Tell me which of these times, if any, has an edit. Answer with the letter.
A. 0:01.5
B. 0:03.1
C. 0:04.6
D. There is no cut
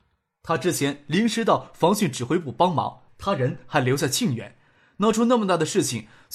B